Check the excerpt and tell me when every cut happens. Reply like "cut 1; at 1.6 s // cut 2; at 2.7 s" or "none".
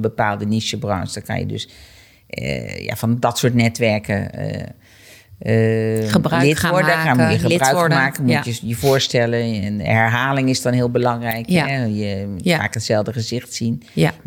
none